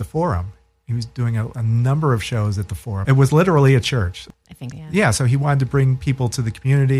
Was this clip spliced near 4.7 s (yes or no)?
yes